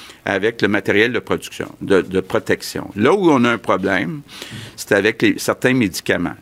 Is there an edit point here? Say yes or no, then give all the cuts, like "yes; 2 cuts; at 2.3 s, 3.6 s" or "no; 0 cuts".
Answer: no; 0 cuts